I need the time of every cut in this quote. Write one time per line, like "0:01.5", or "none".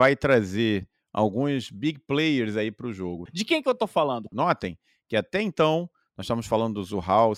0:03.3
0:04.3